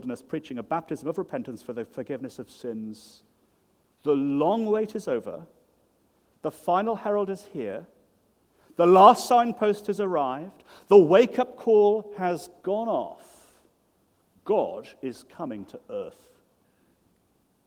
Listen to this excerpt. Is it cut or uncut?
uncut